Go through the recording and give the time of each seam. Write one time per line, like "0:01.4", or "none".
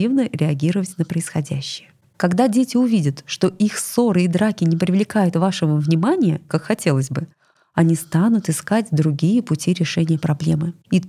0:06.5

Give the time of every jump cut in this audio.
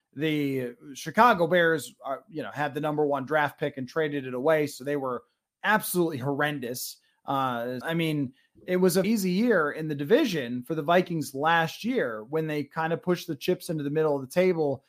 0:07.8
0:09.0

